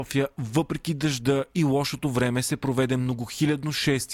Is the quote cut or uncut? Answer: uncut